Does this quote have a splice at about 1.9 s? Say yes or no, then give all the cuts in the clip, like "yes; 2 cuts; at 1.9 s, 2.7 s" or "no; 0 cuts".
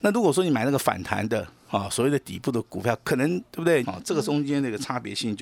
no; 1 cut; at 3.8 s